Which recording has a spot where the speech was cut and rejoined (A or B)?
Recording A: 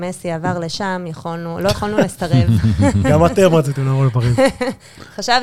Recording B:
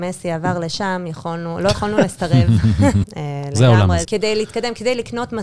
B